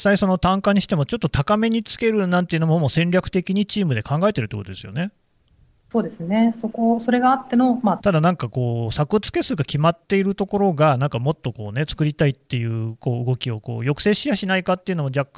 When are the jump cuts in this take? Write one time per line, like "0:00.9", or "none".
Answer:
0:08.0